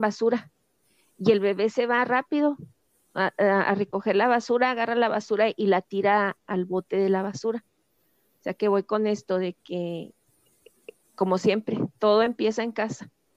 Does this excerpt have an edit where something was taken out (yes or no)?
no